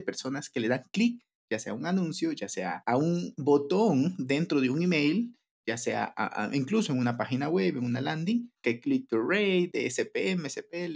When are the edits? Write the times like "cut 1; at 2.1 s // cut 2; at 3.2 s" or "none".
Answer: cut 1; at 8.6 s // cut 2; at 9.7 s

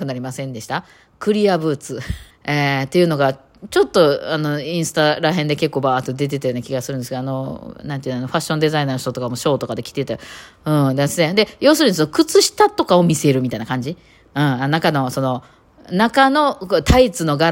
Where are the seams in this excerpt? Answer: cut 1; at 2.3 s

